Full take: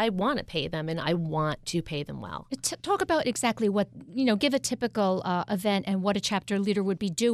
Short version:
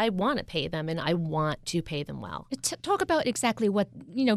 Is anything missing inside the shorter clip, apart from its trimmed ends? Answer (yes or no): no